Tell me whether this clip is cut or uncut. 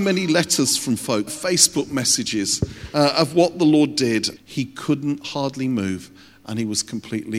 cut